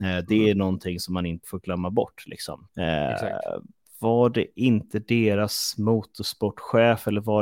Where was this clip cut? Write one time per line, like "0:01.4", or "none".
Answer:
0:01.4
0:02.7